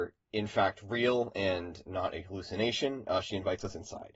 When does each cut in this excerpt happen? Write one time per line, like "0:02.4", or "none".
none